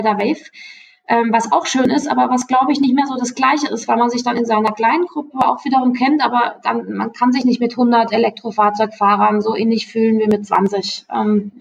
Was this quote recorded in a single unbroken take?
yes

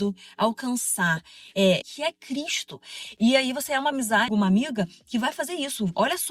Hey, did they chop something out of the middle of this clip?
yes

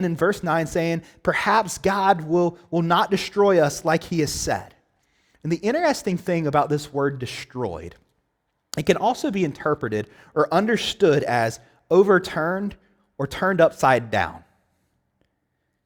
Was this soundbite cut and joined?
no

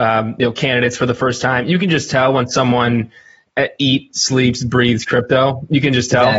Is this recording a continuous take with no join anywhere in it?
yes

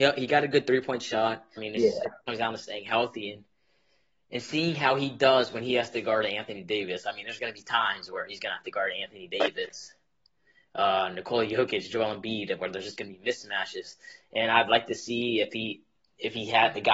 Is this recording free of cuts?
no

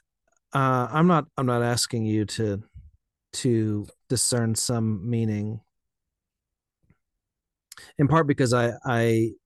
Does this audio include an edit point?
yes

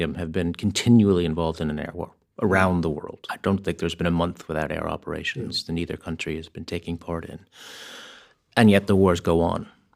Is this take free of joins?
yes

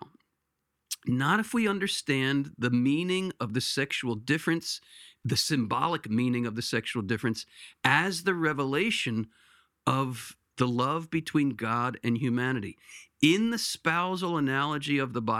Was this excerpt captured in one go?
yes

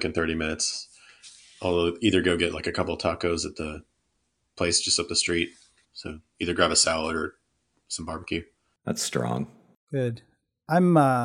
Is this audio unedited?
no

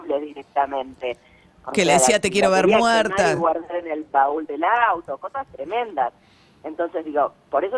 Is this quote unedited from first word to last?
yes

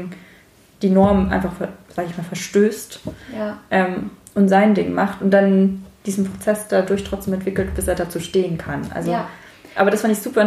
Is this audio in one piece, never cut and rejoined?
yes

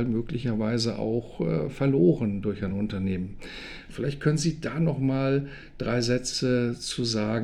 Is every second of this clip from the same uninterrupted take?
yes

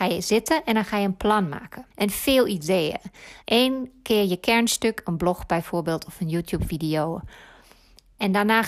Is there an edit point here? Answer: yes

